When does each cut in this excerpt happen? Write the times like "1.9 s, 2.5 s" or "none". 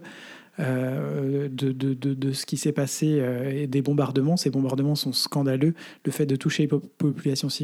none